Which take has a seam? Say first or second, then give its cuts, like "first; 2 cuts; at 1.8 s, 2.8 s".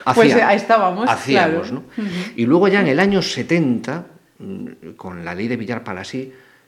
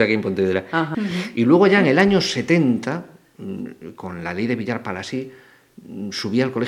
second; 1 cut; at 0.9 s